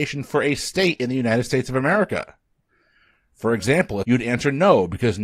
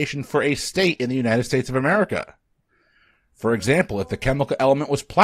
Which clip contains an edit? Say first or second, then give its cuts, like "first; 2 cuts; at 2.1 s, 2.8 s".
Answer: first; 1 cut; at 4.0 s